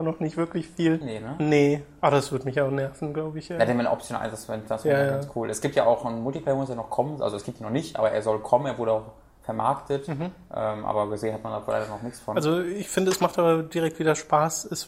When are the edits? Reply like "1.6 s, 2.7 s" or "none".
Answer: 1.0 s